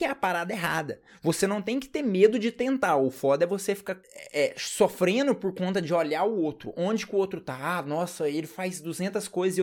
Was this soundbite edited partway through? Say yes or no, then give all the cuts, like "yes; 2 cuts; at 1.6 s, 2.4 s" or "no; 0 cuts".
no; 0 cuts